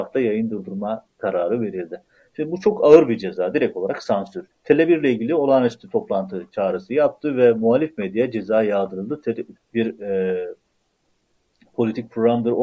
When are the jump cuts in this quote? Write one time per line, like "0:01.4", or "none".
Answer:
0:04.5
0:09.6